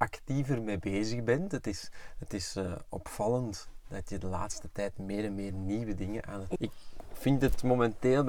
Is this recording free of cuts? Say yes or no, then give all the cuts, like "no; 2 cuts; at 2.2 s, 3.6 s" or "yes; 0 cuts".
no; 1 cut; at 6.6 s